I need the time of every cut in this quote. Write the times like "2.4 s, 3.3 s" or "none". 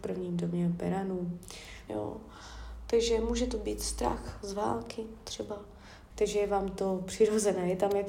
1.9 s, 6.1 s